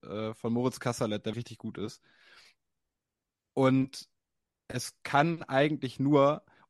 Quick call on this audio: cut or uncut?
cut